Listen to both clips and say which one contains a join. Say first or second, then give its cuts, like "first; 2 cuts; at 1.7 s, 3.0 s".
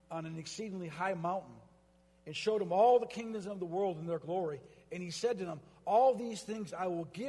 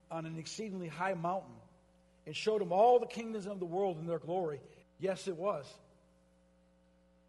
second; 1 cut; at 4.8 s